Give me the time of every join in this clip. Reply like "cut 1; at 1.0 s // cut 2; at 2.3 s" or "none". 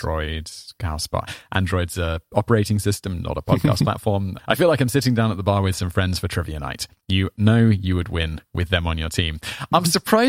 cut 1; at 4.4 s